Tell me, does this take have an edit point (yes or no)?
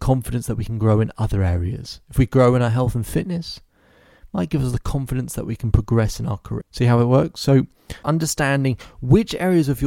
yes